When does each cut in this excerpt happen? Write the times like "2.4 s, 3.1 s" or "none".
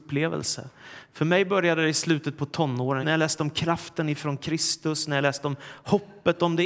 3.0 s